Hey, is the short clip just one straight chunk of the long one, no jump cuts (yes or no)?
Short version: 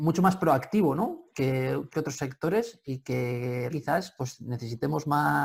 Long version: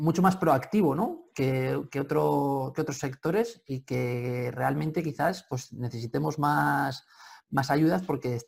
no